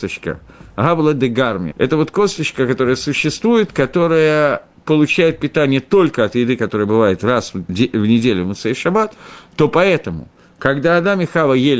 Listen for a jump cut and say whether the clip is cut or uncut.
cut